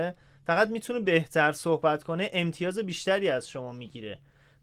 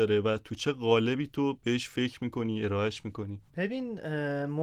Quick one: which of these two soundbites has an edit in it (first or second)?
second